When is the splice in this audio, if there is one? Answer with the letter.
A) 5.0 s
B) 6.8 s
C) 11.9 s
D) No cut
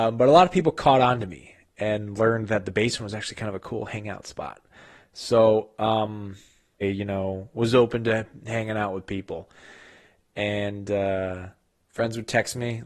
B